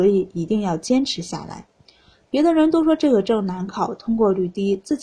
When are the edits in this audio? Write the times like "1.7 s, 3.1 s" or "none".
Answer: 2.2 s